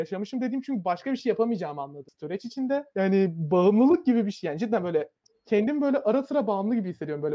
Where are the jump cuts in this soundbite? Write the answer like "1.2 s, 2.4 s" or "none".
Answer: 2.9 s